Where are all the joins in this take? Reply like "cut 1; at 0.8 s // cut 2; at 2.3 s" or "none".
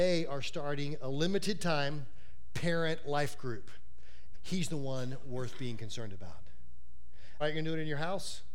cut 1; at 4.3 s // cut 2; at 7.4 s